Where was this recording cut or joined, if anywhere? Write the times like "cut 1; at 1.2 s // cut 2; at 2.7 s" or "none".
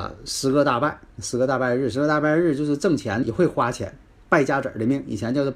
cut 1; at 3.2 s

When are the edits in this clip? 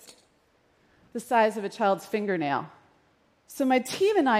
cut 1; at 3.3 s

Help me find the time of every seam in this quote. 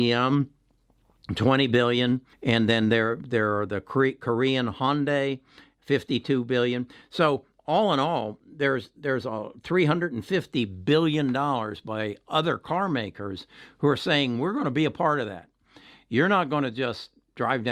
none

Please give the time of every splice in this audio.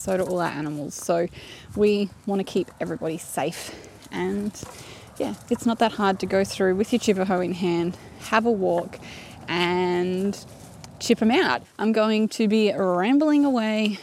cut 1; at 11.6 s

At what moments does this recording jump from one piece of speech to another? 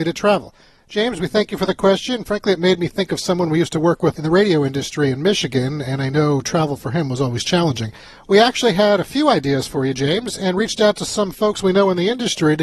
none

